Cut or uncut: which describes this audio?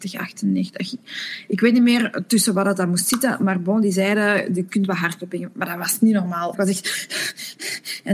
cut